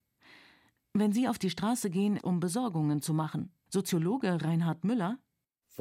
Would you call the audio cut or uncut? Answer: cut